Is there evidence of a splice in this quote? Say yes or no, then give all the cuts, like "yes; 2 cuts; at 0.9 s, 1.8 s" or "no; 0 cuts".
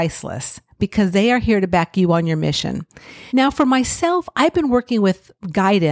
yes; 1 cut; at 3.3 s